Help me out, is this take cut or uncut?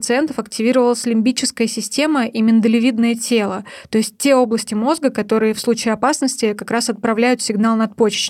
uncut